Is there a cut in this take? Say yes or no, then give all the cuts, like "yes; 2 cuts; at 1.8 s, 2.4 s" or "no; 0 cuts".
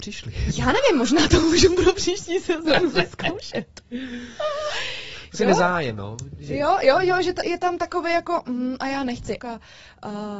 yes; 2 cuts; at 7.4 s, 9.4 s